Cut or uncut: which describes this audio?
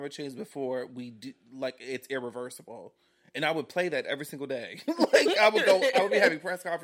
uncut